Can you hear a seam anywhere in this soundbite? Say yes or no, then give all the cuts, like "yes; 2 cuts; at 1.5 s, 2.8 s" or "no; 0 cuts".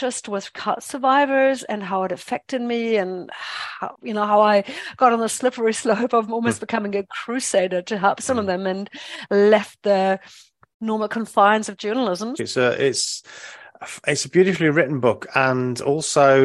yes; 2 cuts; at 3.9 s, 12.4 s